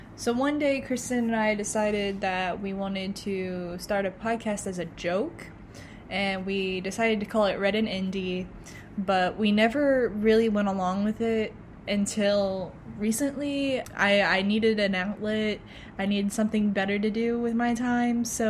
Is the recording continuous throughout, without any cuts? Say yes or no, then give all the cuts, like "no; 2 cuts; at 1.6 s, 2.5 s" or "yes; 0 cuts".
yes; 0 cuts